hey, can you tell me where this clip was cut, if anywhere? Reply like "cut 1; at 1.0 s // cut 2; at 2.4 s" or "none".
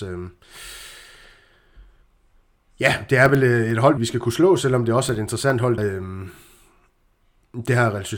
cut 1; at 4.0 s // cut 2; at 5.8 s